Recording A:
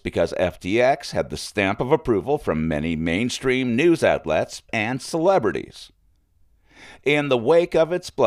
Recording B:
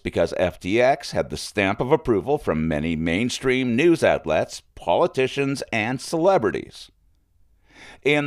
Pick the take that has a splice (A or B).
A